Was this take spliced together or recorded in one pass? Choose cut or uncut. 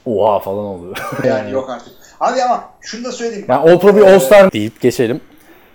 cut